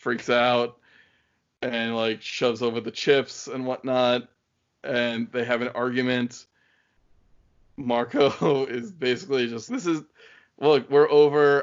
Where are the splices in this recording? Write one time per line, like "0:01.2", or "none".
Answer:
0:09.7